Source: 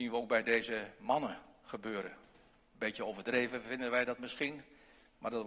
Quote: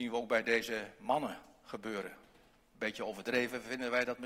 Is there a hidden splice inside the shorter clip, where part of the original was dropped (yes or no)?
no